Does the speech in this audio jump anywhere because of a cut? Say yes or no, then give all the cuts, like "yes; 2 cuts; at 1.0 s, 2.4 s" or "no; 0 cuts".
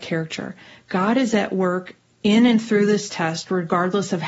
no; 0 cuts